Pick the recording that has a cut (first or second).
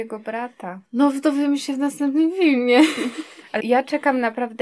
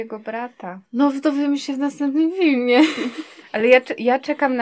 first